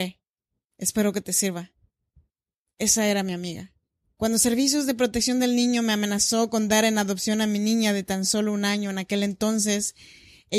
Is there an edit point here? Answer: no; 0 cuts

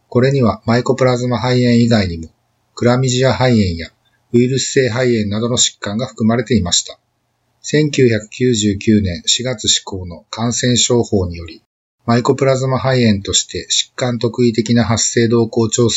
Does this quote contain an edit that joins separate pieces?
no; 0 cuts

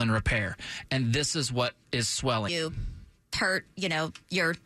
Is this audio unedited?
no; 1 cut; at 2.5 s

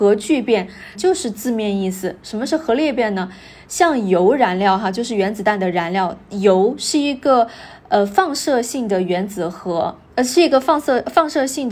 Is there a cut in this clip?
yes; 1 cut; at 1.0 s

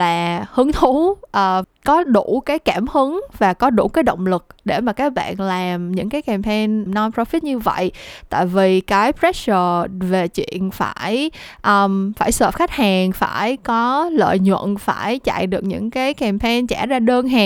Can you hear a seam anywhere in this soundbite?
yes; 2 cuts; at 1.6 s, 6.9 s

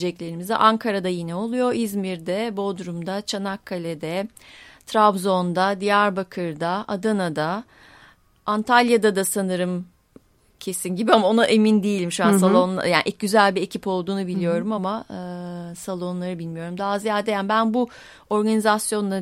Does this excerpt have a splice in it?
no; 0 cuts

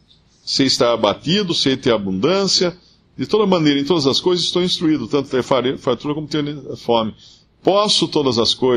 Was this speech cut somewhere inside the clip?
no; 0 cuts

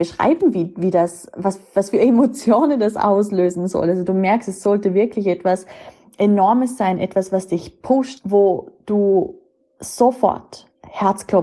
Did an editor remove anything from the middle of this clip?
yes; 1 cut; at 8.2 s

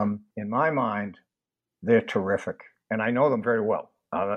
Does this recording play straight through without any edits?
yes; 0 cuts

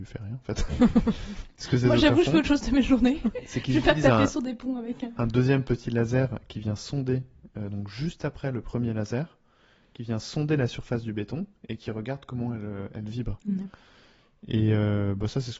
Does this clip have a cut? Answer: no; 0 cuts

